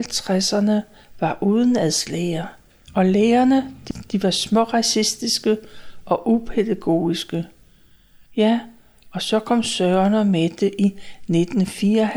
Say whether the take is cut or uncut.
cut